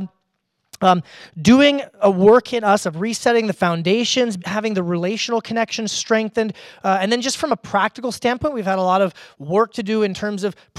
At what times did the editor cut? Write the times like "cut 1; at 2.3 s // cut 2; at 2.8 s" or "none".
cut 1; at 4.4 s